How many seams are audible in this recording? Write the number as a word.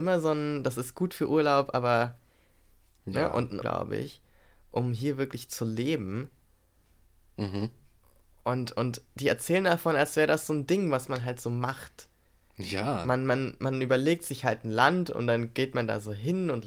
one